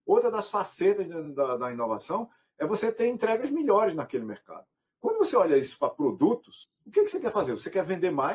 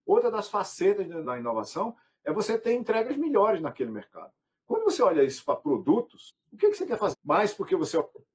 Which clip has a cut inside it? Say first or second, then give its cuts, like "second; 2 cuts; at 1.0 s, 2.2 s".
second; 2 cuts; at 1.2 s, 7.1 s